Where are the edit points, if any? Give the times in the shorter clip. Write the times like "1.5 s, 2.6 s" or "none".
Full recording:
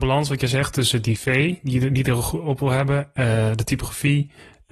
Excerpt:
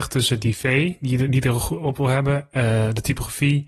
none